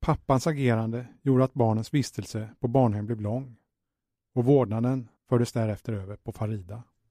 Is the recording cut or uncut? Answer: cut